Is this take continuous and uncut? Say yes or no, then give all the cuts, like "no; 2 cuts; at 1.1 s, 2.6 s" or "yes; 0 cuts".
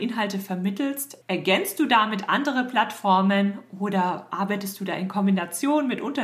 no; 1 cut; at 1.2 s